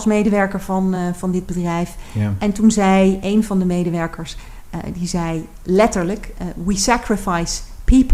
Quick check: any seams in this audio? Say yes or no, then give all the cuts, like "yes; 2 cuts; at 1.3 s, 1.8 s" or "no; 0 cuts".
no; 0 cuts